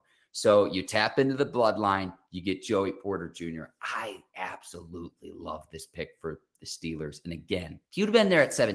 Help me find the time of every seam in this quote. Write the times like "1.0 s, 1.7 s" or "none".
7.8 s